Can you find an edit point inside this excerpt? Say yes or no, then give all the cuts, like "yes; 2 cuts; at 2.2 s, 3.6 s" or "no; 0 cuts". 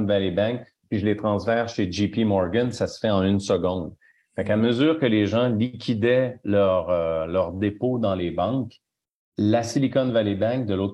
no; 0 cuts